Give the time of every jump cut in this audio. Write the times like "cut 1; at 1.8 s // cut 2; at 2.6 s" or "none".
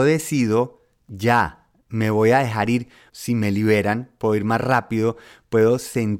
cut 1; at 3.1 s